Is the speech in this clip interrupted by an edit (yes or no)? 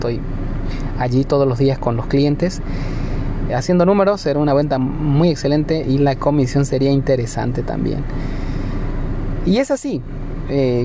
yes